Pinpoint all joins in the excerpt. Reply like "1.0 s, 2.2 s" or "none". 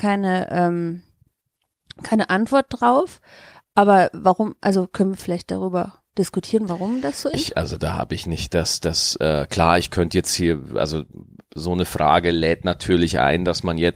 7.3 s